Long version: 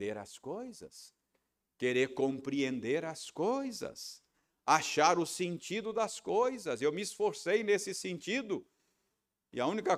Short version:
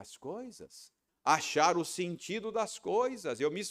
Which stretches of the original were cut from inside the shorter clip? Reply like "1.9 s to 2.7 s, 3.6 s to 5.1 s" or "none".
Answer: 1.3 s to 4.5 s